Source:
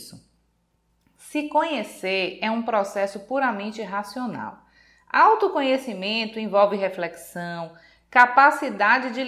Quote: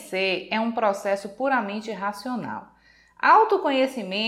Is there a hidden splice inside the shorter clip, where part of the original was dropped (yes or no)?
no